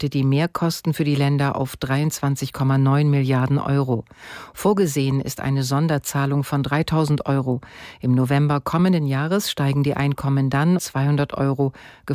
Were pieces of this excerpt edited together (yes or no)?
yes